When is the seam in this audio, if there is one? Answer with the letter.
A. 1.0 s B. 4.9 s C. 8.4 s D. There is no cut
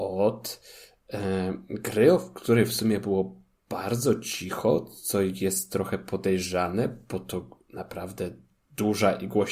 D